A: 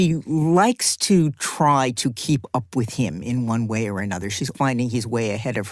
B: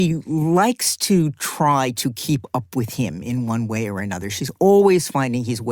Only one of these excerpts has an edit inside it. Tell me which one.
A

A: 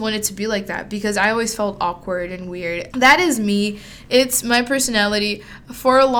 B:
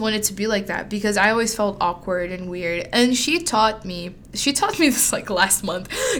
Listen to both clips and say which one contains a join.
A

